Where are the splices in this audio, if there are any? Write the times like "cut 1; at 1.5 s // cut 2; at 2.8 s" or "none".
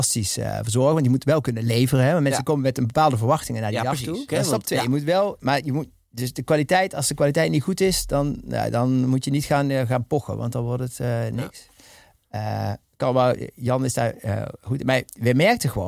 cut 1; at 4.3 s